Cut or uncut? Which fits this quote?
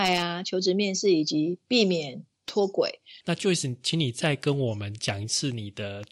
cut